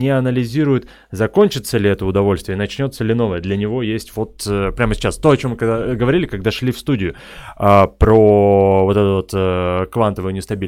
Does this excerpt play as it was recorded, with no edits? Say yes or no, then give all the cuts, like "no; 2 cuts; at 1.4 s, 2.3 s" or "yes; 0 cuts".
yes; 0 cuts